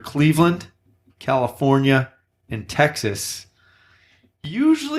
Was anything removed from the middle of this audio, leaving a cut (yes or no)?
yes